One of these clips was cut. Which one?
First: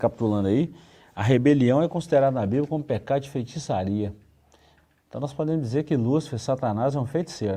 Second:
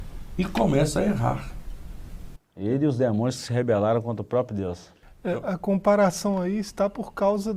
second; 1 cut; at 2.4 s

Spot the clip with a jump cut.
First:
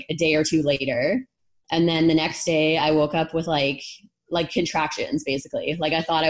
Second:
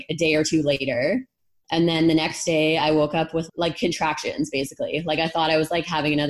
second; 1 cut; at 3.5 s

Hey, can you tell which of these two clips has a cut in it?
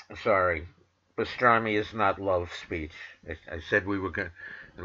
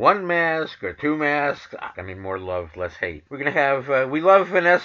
second; 2 cuts; at 1.9 s, 3.3 s

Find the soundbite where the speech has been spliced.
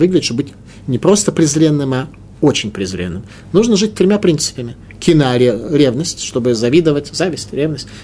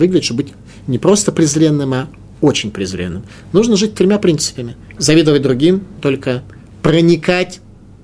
second; 2 cuts; at 5.0 s, 6.0 s

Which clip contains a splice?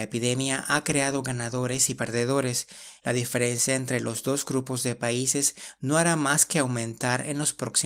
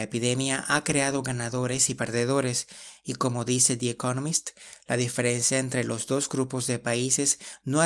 first; 1 cut; at 3.0 s

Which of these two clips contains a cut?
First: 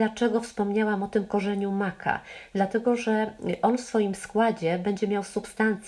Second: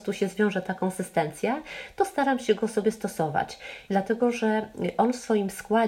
second; 1 cut; at 3.9 s

